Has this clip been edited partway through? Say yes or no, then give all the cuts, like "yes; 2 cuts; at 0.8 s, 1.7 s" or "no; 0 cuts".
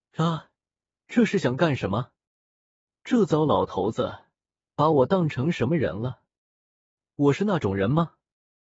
no; 0 cuts